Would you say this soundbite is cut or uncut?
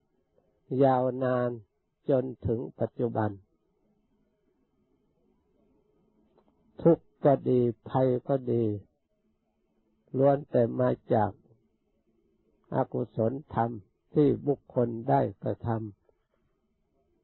uncut